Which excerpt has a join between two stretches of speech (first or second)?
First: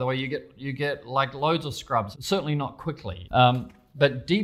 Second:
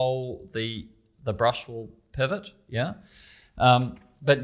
first